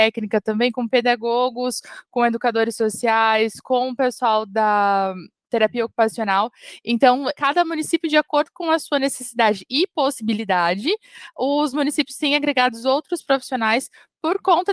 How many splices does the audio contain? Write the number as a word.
one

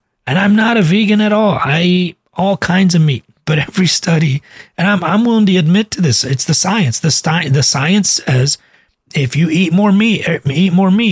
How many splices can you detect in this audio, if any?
zero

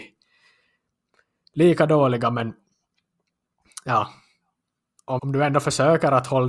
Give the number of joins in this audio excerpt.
one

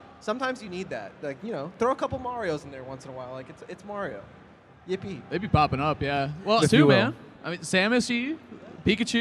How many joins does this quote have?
two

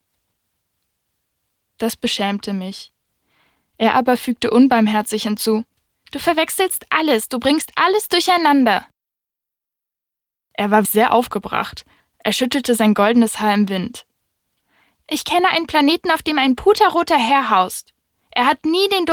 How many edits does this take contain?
one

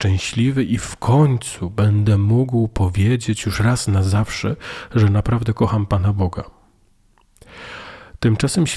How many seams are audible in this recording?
zero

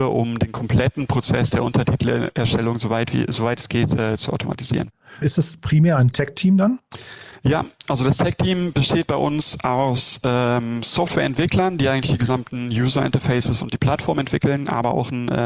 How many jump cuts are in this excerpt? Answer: one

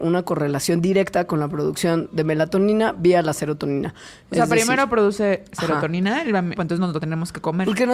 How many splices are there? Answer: one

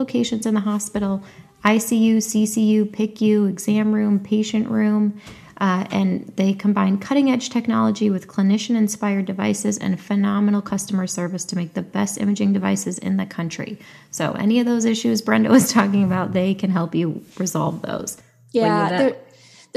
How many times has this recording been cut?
zero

